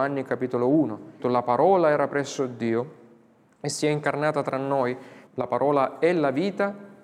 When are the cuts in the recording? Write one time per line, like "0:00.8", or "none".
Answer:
0:01.2
0:05.3